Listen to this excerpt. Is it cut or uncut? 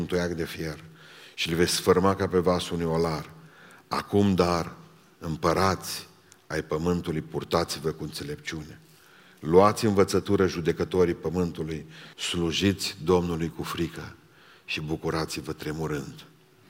cut